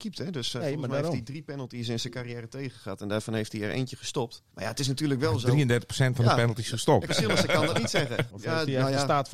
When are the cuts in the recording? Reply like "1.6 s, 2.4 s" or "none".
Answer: 4.5 s, 7.1 s, 8.3 s

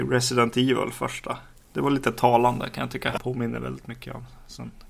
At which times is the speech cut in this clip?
3.2 s

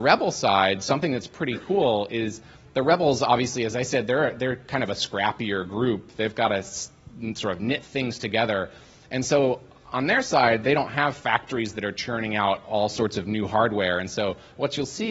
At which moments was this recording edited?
none

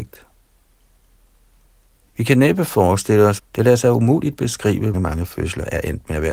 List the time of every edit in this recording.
2.1 s, 3.4 s, 4.9 s

